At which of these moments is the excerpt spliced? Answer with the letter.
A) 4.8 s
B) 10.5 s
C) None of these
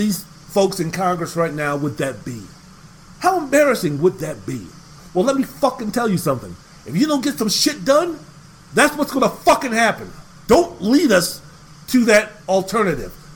B